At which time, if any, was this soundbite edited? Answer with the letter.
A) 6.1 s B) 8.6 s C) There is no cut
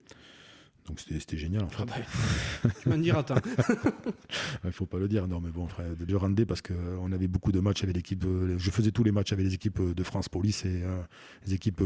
A